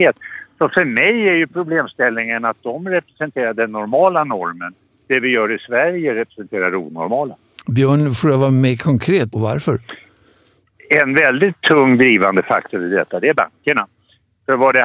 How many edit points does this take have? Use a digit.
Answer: 1